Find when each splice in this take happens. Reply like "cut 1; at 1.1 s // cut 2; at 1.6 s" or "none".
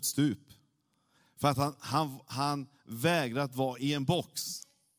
none